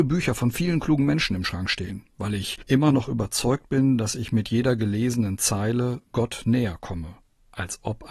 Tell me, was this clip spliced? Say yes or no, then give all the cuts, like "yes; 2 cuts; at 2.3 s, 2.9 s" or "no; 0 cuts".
no; 0 cuts